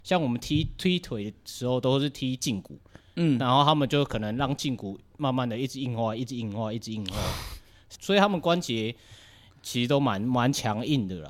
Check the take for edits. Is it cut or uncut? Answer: cut